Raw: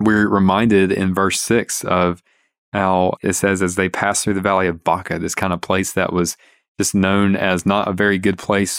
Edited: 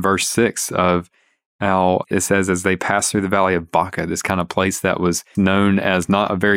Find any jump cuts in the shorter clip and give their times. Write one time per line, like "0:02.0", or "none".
0:05.3